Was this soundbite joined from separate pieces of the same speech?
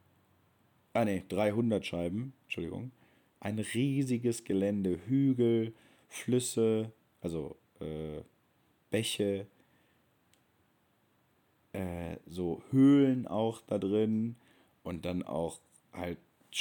yes; 1 cut; at 3.3 s

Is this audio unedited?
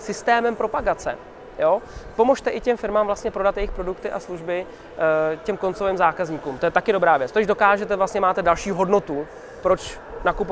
yes; 0 cuts

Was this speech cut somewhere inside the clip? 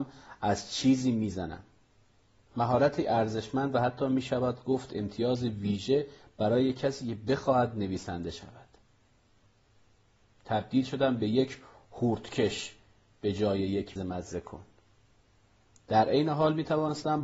yes; 2 cuts; at 10.2 s, 14.0 s

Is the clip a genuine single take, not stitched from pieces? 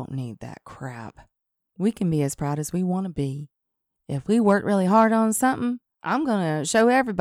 yes; 0 cuts

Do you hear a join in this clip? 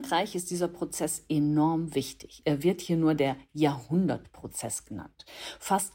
no; 0 cuts

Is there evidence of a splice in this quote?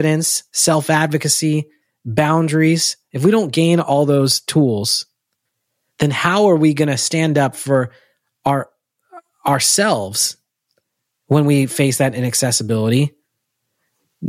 no; 0 cuts

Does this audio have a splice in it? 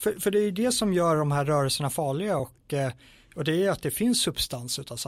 no; 0 cuts

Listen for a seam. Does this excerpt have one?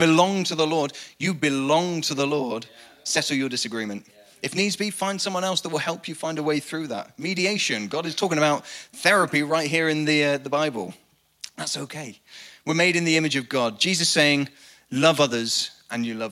no; 0 cuts

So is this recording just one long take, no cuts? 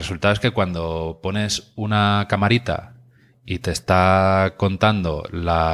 yes; 0 cuts

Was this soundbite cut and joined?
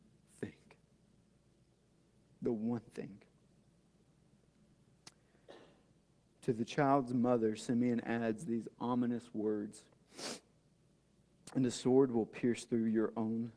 no; 0 cuts

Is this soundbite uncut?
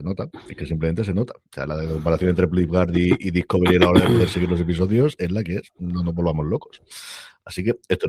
yes; 0 cuts

